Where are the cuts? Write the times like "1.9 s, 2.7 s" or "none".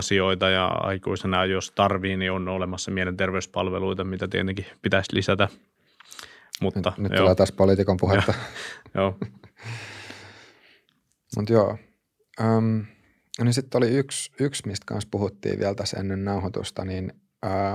none